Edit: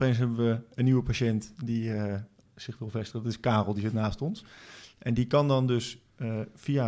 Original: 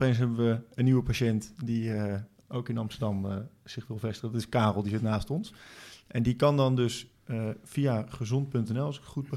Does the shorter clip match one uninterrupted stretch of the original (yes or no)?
no